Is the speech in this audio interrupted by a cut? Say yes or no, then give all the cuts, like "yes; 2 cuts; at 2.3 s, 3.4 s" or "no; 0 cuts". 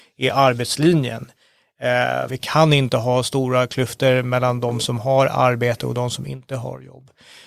yes; 1 cut; at 2.3 s